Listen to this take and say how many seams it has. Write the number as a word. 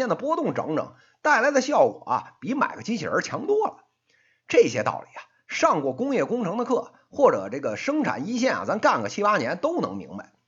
zero